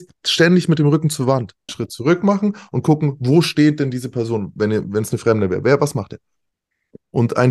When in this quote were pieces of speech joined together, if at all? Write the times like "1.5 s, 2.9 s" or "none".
1.7 s